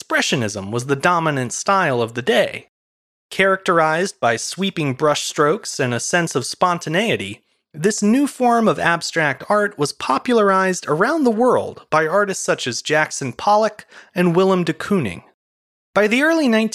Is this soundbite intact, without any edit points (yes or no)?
no